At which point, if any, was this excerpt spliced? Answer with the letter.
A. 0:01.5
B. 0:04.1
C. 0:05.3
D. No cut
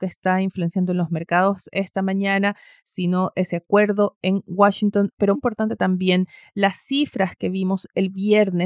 C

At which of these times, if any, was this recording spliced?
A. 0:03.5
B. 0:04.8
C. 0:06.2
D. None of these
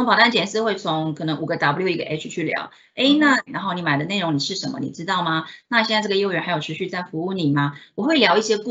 A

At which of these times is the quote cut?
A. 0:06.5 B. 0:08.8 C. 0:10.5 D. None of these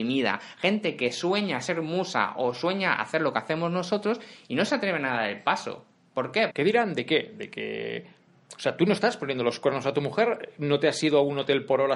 A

